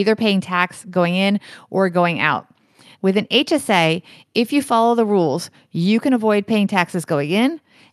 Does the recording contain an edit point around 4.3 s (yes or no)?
no